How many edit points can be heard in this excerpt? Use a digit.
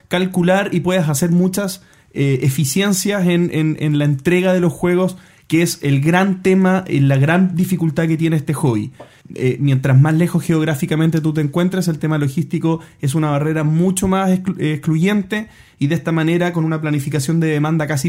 1